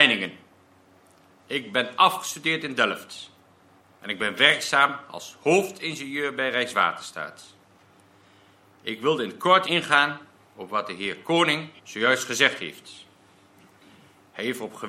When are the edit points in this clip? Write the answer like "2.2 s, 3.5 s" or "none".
9.6 s, 11.8 s